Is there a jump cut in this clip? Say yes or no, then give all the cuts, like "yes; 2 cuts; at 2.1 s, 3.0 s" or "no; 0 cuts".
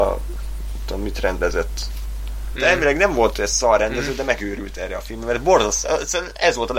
yes; 1 cut; at 2.5 s